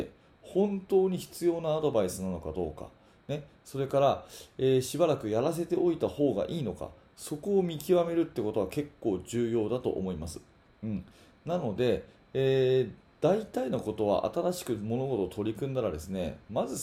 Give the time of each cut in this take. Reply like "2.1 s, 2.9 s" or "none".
none